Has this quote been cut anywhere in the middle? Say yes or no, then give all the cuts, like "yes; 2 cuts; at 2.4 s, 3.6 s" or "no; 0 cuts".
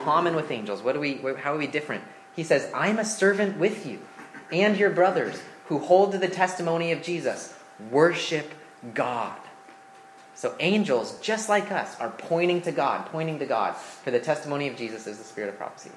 no; 0 cuts